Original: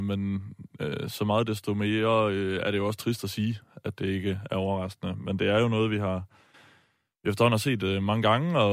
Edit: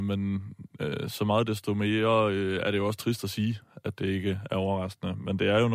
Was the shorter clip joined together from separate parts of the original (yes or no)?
no